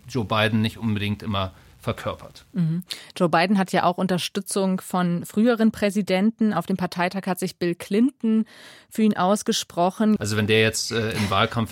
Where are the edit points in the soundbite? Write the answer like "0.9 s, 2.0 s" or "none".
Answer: 10.2 s